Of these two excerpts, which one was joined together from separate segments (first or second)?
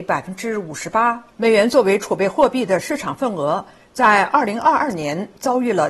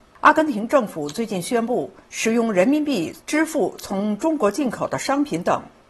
first